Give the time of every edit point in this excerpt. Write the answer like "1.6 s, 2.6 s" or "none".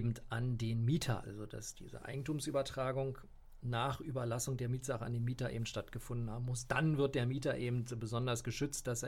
1.2 s